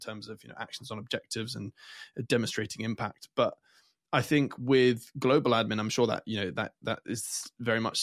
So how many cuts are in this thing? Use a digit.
1